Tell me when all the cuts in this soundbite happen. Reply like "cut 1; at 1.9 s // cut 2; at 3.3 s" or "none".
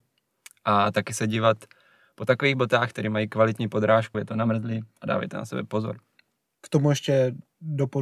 cut 1; at 4.1 s